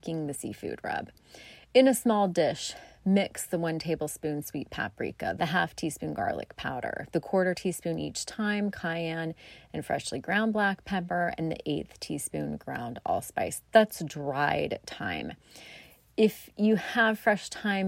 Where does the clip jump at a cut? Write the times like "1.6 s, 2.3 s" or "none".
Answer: 5.4 s